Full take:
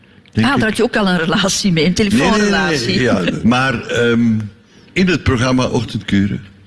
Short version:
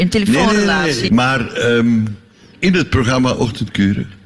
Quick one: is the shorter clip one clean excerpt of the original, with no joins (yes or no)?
no